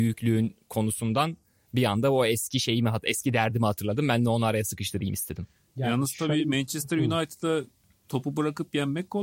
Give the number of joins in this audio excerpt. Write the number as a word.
zero